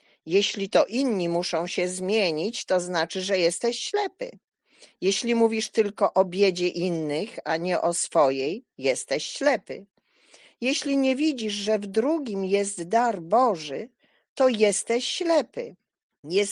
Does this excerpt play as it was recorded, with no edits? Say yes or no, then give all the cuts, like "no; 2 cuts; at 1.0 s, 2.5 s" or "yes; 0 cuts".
yes; 0 cuts